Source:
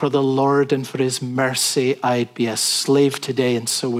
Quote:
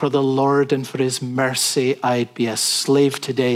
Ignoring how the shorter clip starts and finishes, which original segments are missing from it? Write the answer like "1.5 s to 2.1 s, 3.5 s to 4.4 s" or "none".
none